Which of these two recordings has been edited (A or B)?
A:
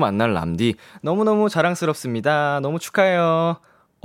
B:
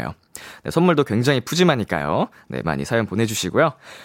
B